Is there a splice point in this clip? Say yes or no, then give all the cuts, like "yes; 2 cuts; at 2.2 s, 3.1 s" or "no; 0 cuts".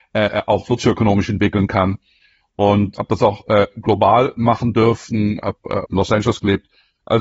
yes; 2 cuts; at 3.0 s, 5.8 s